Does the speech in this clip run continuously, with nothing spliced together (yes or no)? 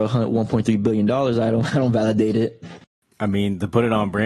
yes